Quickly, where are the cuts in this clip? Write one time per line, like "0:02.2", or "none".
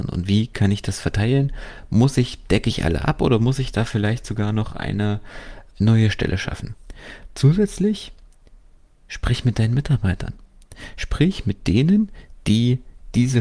0:05.7